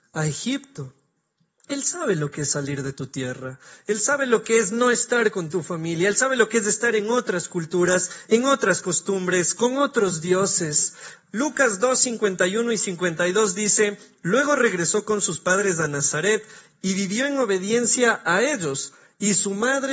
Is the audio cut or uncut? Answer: cut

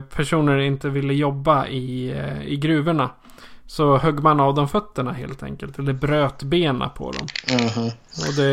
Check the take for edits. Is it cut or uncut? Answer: uncut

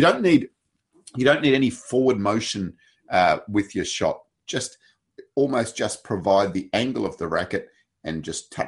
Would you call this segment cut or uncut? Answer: uncut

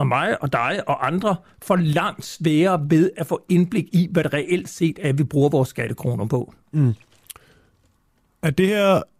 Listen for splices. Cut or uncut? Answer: uncut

